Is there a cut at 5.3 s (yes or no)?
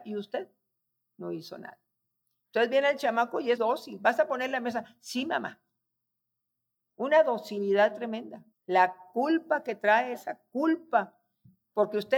no